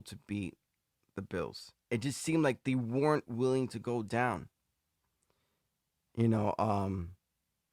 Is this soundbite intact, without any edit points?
no; 1 cut; at 1.9 s

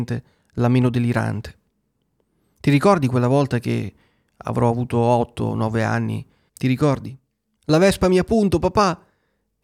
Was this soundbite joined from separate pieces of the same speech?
yes; 1 cut; at 6.5 s

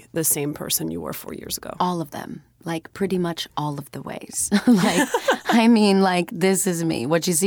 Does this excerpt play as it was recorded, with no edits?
yes; 0 cuts

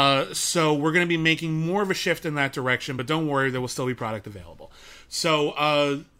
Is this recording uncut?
yes; 0 cuts

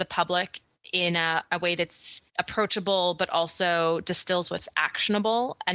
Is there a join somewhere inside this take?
yes; 1 cut; at 2.3 s

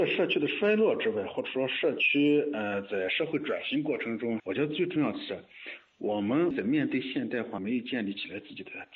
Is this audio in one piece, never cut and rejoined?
no; 2 cuts; at 4.4 s, 7.6 s

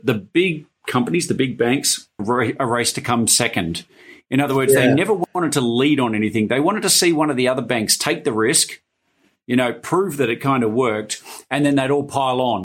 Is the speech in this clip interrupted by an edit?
yes; 1 cut; at 2.2 s

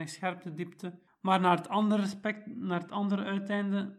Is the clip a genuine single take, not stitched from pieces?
no; 1 cut; at 1.1 s

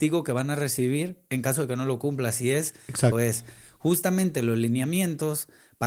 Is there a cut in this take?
yes; 1 cut; at 3.1 s

